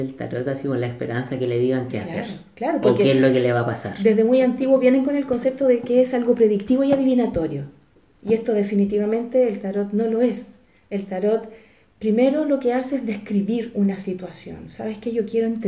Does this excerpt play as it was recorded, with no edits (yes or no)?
yes